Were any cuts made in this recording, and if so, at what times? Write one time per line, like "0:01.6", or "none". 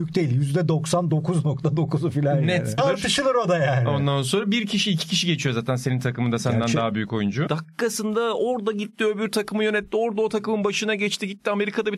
0:02.8
0:07.5